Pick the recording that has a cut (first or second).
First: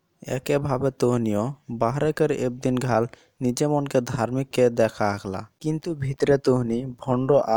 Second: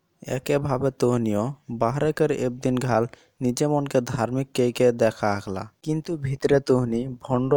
first